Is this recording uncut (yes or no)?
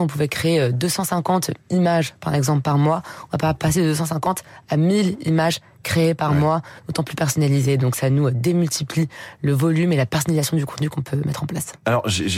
yes